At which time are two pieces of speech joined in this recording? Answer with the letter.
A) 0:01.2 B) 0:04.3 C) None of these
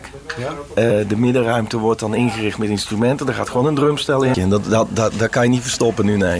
B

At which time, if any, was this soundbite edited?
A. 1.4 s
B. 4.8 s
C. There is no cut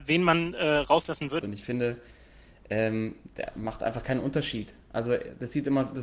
A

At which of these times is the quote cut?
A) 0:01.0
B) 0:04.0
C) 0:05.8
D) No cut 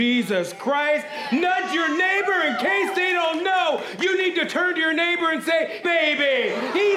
C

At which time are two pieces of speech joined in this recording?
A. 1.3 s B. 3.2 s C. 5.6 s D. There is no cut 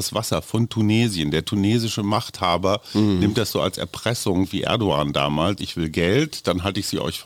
C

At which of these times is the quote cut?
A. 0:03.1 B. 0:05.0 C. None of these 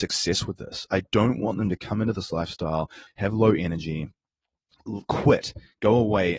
A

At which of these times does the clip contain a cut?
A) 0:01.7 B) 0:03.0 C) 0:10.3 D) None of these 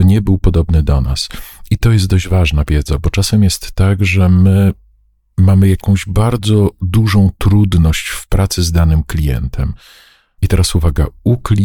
C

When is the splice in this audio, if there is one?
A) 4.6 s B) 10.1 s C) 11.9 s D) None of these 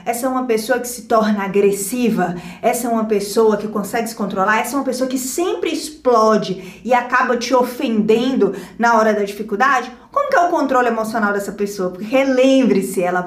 D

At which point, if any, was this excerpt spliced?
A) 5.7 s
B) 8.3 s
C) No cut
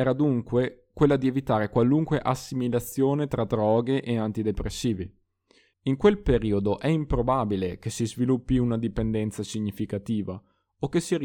A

